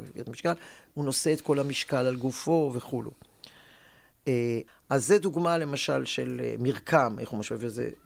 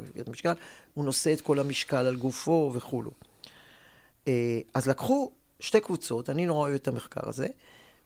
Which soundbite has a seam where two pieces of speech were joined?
first; 1 cut; at 4.7 s

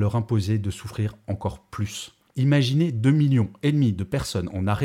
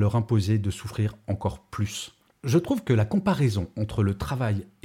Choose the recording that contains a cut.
first; 1 cut; at 2.3 s

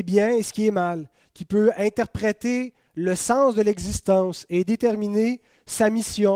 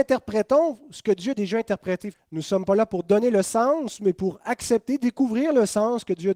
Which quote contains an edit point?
second; 1 cut; at 2.1 s

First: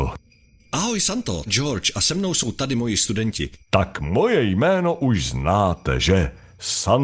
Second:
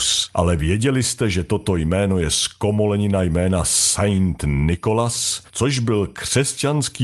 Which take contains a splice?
first; 2 cuts; at 1.5 s, 3.6 s

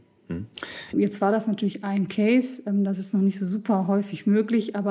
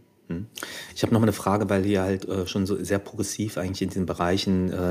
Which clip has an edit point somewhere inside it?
first; 1 cut; at 0.9 s

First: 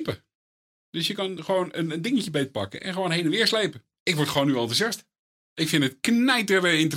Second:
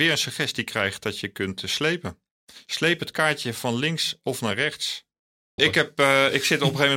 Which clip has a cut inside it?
second; 1 cut; at 5.6 s

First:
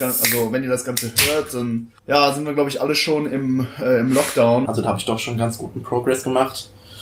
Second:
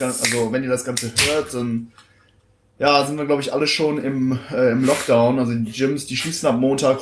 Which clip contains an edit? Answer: first; 2 cuts; at 2.0 s, 4.6 s

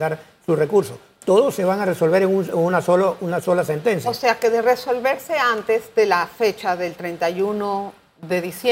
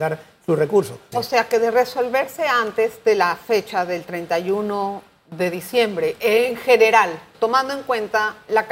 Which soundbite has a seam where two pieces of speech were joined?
second; 2 cuts; at 1.1 s, 7.3 s

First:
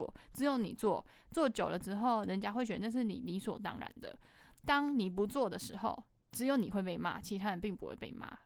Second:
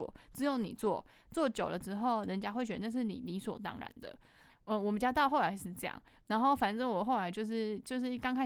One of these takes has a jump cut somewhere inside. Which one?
second; 1 cut; at 4.5 s

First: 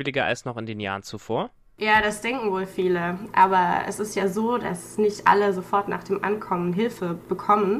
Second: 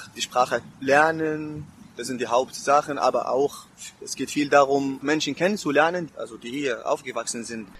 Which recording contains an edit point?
second; 2 cuts; at 5.0 s, 6.1 s

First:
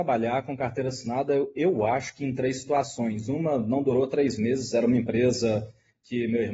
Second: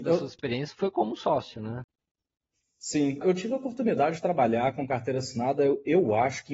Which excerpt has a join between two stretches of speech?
second; 1 cut; at 3.2 s

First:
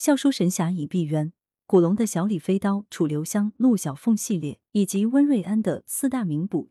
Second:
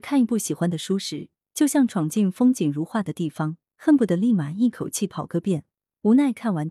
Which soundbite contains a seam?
first; 1 cut; at 4.7 s

